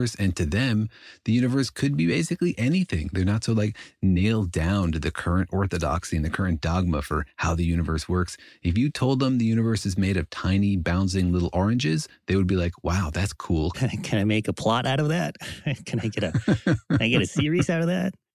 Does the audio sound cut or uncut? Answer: cut